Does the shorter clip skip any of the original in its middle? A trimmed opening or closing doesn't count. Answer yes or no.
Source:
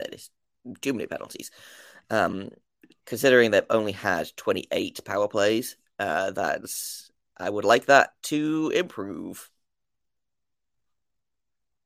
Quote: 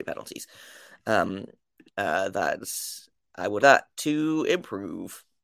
yes